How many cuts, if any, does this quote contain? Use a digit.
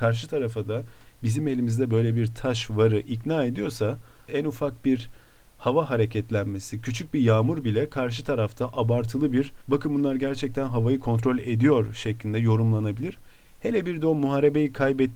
2